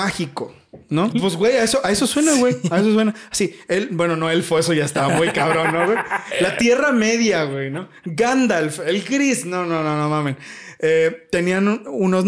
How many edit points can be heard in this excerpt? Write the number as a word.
one